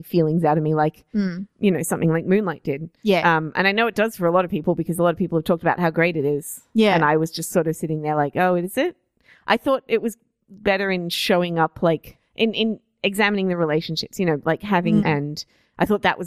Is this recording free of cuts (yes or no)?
no